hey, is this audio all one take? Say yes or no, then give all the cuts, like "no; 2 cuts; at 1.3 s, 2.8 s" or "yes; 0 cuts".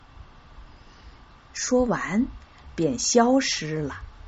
no; 1 cut; at 1.4 s